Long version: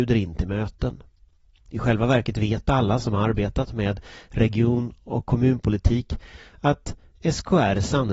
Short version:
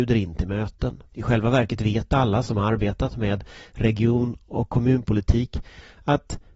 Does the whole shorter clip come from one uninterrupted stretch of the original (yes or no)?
no